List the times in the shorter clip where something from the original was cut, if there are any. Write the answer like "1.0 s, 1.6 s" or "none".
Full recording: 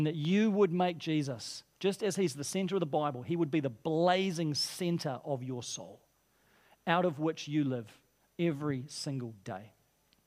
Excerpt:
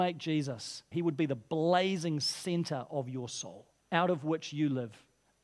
0.9 s, 3.8 s